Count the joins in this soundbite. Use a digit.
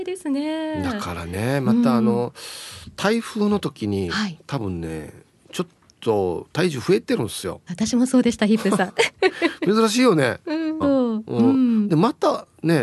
2